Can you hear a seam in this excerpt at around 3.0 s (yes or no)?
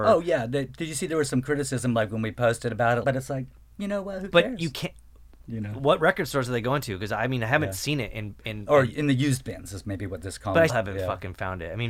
yes